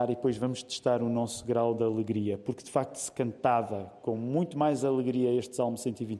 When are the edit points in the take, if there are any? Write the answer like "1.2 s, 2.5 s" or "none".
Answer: none